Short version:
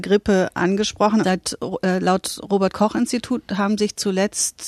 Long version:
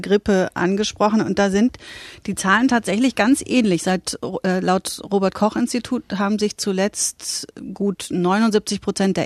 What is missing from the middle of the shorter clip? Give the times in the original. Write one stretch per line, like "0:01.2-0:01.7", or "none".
0:01.2-0:03.8